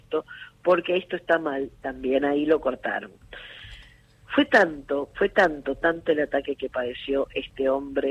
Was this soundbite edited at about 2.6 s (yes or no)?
no